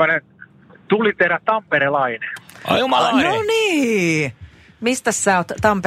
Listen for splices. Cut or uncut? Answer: uncut